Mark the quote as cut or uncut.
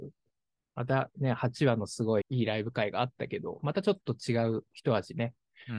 cut